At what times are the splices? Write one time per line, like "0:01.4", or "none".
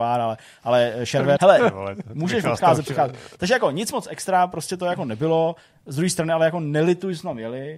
0:01.4